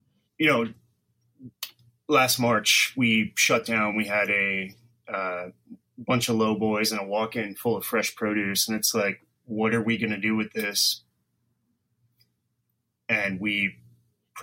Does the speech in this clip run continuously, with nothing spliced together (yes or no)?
yes